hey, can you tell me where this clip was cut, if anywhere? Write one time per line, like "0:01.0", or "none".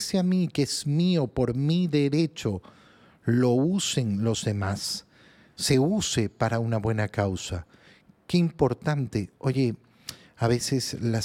none